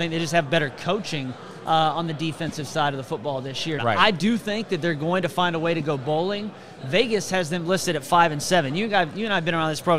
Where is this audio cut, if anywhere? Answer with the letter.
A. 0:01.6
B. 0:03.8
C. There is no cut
B